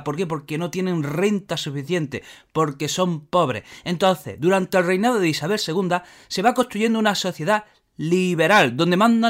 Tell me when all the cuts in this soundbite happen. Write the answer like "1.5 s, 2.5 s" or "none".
none